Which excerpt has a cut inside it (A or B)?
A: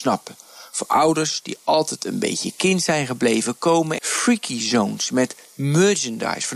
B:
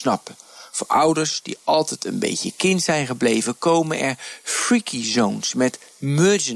A